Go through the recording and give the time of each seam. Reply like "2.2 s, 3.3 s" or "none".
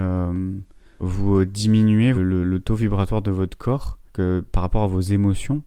1.0 s, 2.1 s, 4.1 s